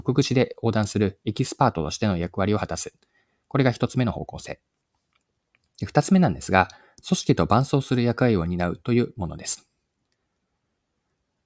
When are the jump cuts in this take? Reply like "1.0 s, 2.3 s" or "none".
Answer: none